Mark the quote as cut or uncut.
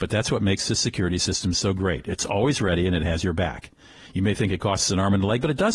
uncut